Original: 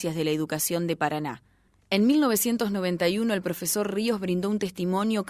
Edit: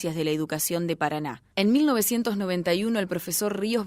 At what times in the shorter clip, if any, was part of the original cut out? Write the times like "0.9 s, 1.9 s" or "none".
1.5 s